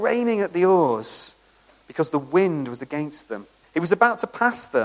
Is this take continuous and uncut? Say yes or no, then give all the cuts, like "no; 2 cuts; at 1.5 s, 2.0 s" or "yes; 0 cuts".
no; 1 cut; at 3.6 s